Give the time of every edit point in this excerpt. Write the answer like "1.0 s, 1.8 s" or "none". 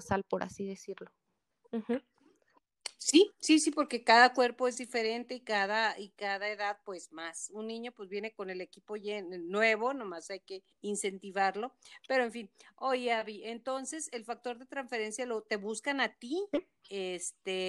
10.7 s